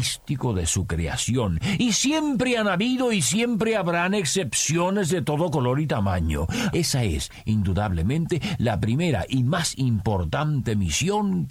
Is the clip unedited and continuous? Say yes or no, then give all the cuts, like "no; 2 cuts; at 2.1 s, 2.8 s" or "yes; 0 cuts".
no; 1 cut; at 6.7 s